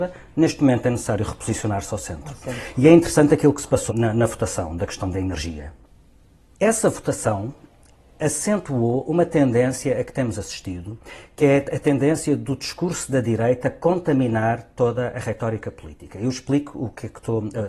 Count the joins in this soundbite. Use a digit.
1